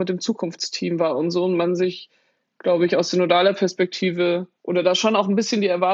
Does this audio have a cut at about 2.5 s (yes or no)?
no